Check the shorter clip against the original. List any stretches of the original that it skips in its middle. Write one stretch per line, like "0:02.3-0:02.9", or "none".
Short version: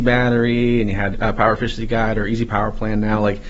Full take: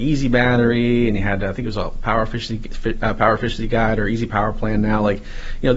0:01.4-0:02.9